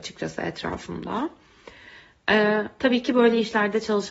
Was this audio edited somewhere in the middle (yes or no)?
yes